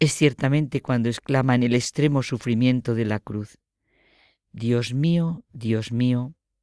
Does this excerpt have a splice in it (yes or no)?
no